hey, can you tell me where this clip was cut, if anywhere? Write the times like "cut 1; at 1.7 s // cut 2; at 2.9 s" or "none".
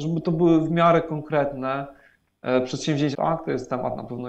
cut 1; at 3.1 s